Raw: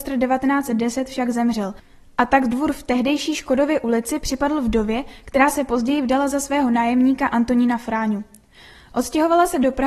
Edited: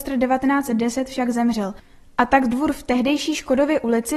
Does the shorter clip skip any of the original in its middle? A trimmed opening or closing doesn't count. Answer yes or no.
no